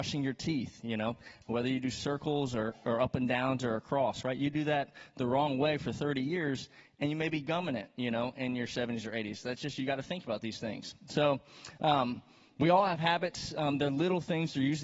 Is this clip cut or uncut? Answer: uncut